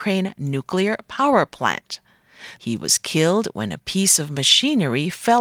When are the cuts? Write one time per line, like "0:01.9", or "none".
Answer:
0:02.6